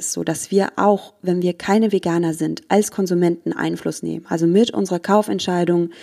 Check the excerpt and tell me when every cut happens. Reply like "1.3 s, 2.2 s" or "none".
none